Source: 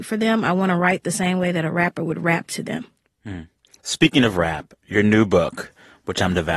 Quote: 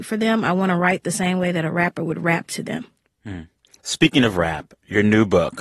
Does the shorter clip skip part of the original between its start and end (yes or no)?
no